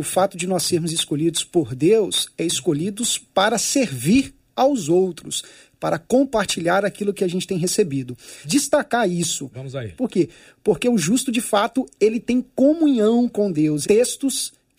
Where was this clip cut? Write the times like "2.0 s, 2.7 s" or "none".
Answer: 8.4 s, 10.0 s, 13.8 s